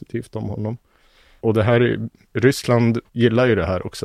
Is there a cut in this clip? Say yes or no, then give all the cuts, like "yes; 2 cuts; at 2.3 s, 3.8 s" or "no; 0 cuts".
yes; 1 cut; at 3.1 s